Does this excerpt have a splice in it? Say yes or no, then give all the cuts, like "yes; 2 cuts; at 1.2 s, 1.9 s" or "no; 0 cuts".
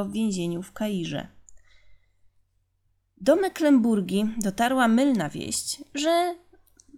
no; 0 cuts